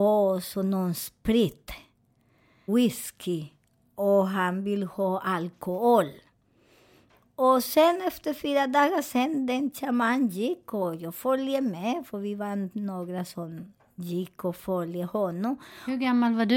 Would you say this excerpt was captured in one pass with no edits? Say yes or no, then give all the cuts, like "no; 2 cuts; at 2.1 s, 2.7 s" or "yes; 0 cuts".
no; 1 cut; at 2.7 s